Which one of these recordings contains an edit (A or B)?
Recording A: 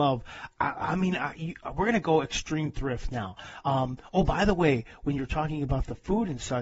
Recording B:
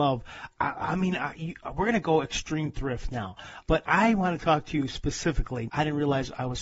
B